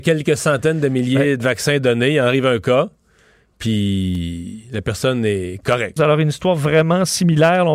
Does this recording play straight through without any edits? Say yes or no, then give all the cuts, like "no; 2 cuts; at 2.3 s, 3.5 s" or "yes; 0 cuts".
no; 1 cut; at 6.0 s